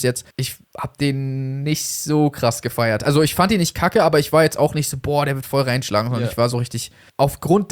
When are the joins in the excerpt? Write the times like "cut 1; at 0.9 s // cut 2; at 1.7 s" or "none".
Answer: none